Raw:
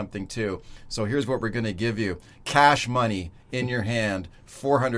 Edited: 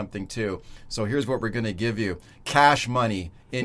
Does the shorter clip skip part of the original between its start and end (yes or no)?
no